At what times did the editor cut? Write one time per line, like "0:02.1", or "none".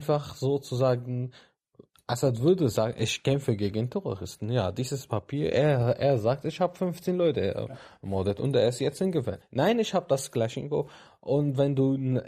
0:09.4